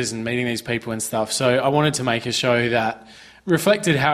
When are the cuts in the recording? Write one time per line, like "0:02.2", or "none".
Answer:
none

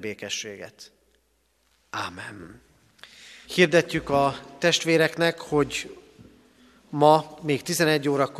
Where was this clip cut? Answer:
0:03.4

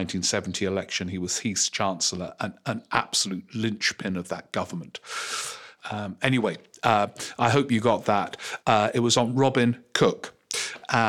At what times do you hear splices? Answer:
0:05.8
0:08.6

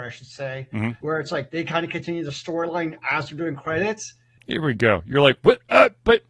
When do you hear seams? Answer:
0:01.0
0:04.4

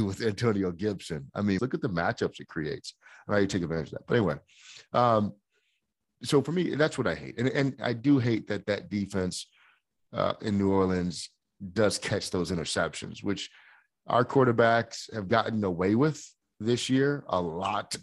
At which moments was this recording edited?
0:01.6

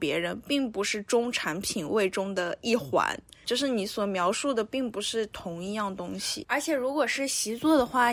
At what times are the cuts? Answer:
0:06.4

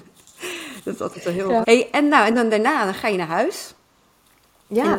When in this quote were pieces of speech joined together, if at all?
0:01.6

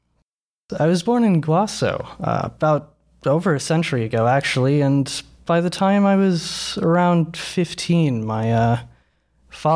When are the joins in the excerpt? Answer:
none

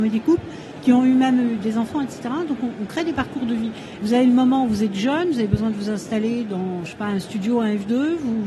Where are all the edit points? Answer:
0:04.0

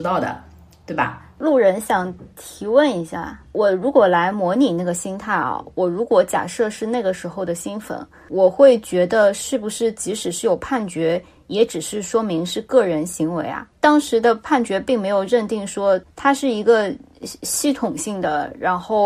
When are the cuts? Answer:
0:01.3
0:13.7
0:16.1

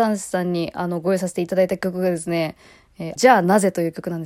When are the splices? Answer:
0:03.2

